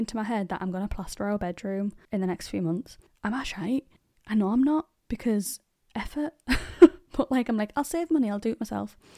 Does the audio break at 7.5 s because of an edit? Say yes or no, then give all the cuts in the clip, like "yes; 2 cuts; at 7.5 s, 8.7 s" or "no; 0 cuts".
no; 1 cut; at 2.0 s